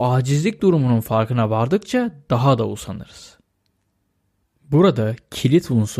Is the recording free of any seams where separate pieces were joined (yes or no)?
yes